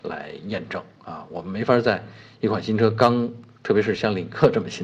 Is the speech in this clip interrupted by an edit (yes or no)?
no